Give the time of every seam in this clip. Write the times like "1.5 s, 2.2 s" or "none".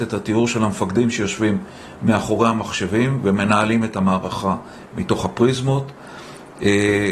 none